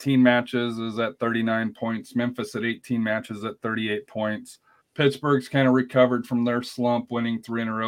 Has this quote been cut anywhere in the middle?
yes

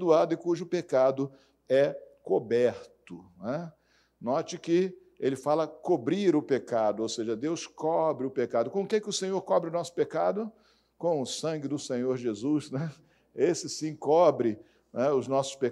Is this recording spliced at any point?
no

